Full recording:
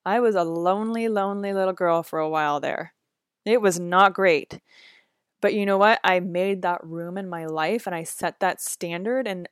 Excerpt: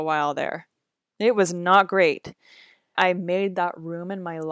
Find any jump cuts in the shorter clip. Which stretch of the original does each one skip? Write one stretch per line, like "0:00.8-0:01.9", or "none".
0:05.2-0:06.0

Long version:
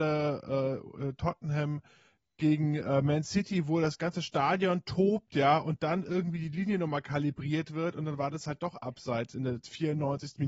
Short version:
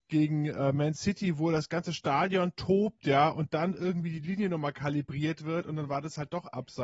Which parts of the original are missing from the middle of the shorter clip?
none

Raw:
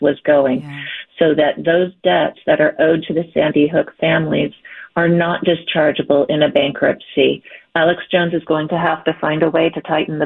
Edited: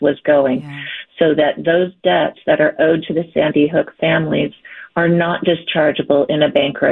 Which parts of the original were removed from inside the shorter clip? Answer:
none

